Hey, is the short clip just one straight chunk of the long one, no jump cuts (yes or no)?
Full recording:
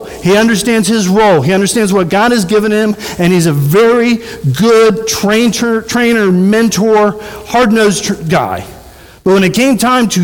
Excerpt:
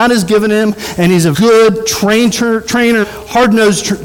no